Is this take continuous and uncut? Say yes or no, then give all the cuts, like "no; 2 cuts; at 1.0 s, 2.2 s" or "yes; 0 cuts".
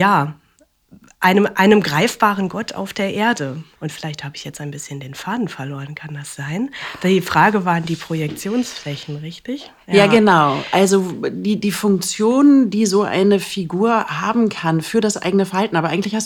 no; 1 cut; at 3.8 s